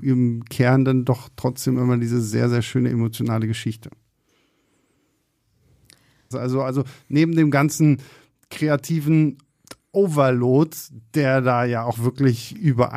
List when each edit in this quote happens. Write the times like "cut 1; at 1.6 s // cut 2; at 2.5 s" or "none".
cut 1; at 6.3 s // cut 2; at 11.9 s